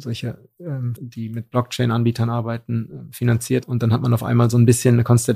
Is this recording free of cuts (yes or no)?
no